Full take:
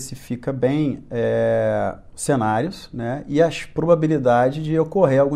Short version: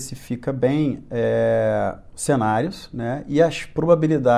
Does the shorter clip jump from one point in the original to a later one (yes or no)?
no